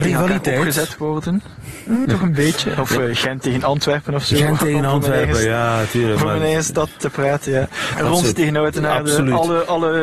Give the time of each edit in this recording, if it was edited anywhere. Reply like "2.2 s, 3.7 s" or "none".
2.1 s, 7.9 s